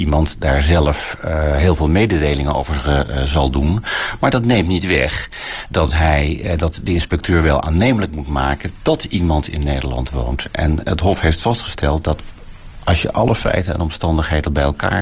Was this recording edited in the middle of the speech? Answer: no; 0 cuts

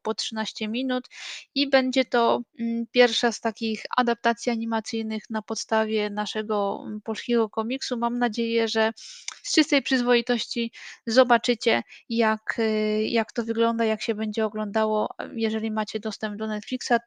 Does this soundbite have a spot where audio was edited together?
no; 0 cuts

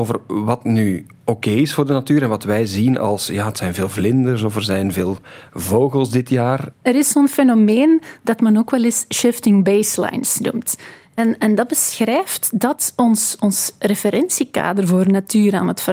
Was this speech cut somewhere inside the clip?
yes; 1 cut; at 6.7 s

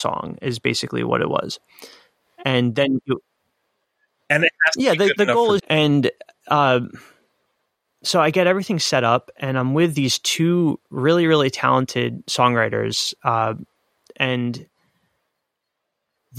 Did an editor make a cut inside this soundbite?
yes; 1 cut; at 5.6 s

